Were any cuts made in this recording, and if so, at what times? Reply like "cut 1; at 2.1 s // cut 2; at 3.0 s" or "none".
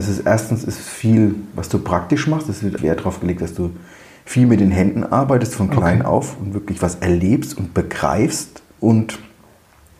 cut 1; at 2.8 s // cut 2; at 8.8 s